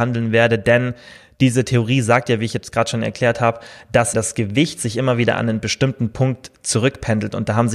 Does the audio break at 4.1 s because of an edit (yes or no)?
yes